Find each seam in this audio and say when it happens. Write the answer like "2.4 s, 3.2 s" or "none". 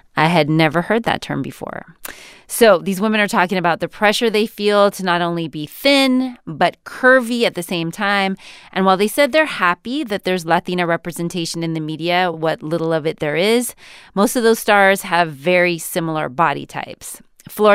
none

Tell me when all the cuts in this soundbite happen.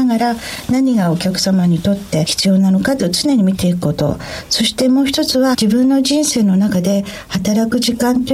5.5 s

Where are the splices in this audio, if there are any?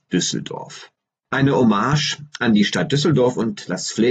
none

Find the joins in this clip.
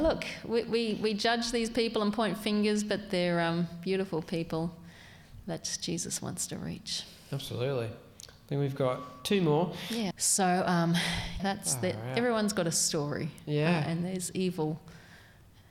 10.1 s, 11.4 s

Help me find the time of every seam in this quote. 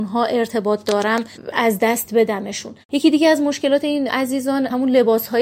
2.8 s

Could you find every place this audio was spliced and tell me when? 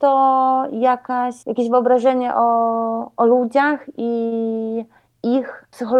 1.4 s

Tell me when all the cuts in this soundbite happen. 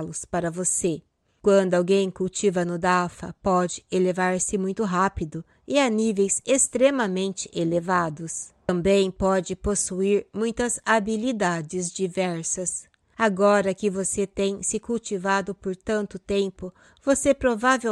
none

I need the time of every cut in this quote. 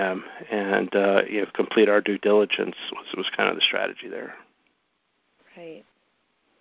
none

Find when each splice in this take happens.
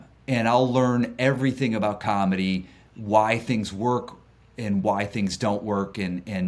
none

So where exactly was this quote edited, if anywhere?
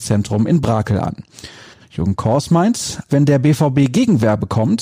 1.8 s, 3.1 s

